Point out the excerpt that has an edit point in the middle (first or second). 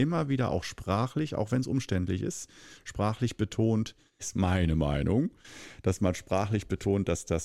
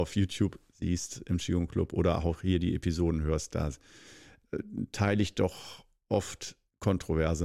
first